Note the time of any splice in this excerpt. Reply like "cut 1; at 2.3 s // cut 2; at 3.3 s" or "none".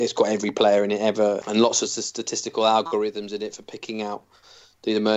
cut 1; at 1.4 s